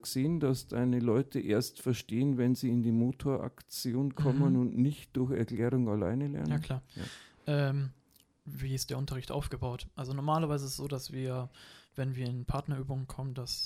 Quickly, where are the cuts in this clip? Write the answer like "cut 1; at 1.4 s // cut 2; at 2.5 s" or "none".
none